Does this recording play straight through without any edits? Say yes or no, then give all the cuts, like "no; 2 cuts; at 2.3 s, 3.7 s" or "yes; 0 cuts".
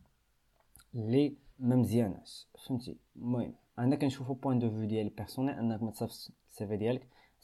no; 1 cut; at 1.5 s